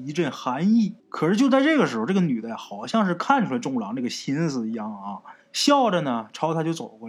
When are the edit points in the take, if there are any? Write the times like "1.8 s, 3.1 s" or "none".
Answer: 1.0 s, 5.4 s

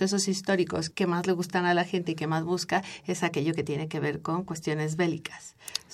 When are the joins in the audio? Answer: 0.9 s

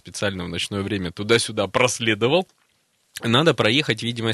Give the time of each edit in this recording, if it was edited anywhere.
none

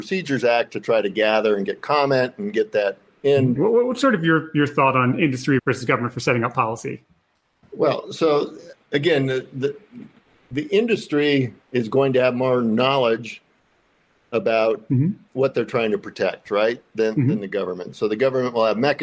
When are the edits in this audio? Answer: 3.6 s, 5.6 s, 11.6 s

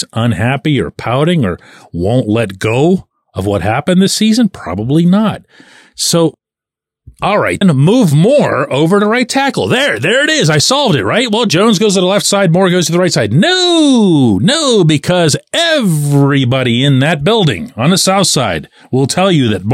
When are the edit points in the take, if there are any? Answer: 7.6 s

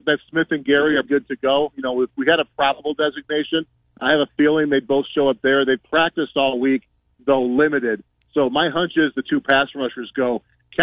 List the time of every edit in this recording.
1.0 s

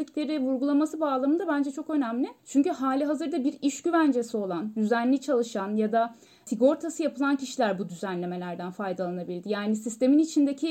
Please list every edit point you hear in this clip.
2.4 s

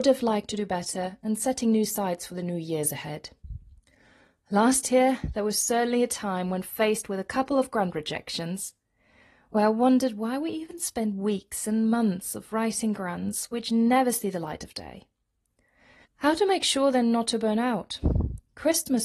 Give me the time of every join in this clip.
16.0 s

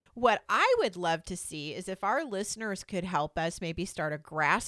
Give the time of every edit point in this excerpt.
none

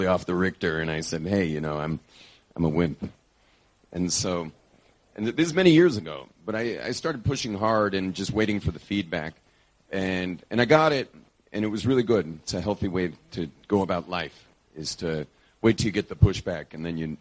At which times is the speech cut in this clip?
none

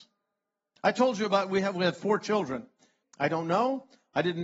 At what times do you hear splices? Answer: 3.0 s

